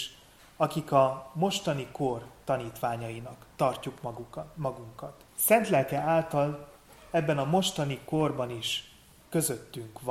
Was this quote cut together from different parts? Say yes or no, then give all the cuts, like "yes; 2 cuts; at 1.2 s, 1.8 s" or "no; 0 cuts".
yes; 1 cut; at 5.3 s